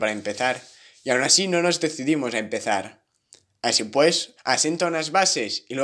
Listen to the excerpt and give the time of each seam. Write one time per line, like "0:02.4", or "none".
0:04.4